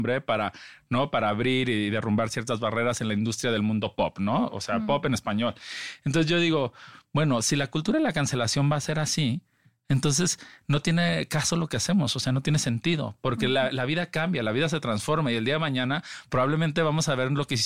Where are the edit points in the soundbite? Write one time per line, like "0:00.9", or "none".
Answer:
none